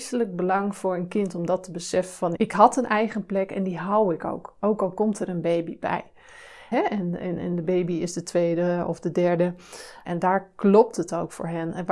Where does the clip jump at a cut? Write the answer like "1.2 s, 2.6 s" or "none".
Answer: 2.4 s, 6.7 s, 10.0 s